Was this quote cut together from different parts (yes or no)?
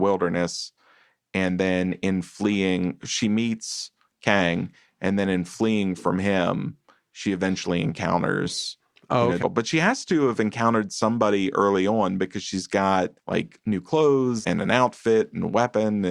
yes